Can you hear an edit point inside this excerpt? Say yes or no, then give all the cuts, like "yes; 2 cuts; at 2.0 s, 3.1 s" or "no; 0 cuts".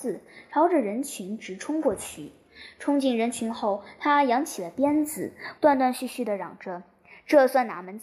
yes; 1 cut; at 5.6 s